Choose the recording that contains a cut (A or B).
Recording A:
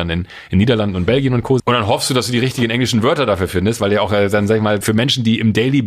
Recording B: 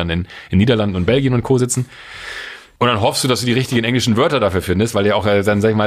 A